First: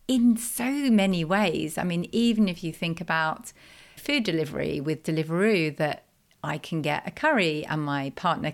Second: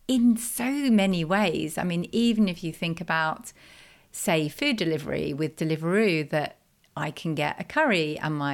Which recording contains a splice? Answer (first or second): first